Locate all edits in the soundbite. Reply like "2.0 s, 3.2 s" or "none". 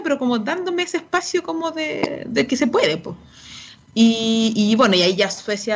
none